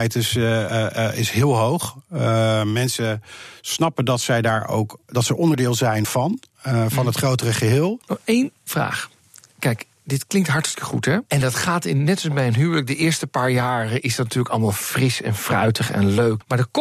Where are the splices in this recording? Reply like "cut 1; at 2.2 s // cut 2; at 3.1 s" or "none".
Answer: cut 1; at 11.2 s